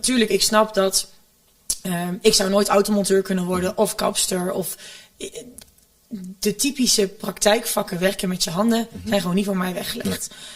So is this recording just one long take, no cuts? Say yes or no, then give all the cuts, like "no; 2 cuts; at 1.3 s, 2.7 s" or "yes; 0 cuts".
yes; 0 cuts